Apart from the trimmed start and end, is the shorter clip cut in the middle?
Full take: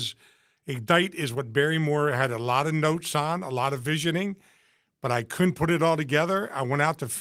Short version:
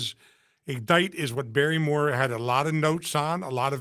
no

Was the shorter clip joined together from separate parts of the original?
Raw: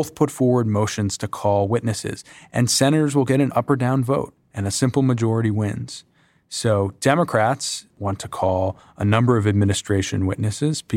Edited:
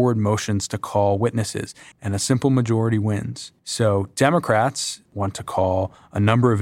yes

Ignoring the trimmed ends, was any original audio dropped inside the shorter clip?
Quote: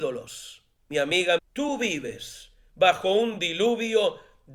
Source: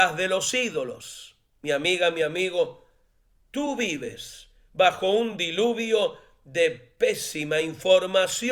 yes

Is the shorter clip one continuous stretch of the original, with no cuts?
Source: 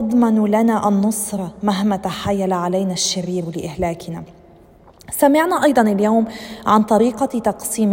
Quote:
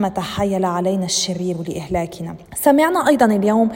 no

